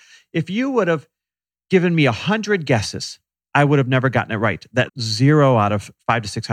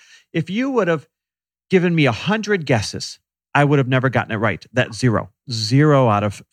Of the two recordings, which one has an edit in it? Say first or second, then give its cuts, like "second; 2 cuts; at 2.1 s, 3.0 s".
first; 1 cut; at 4.9 s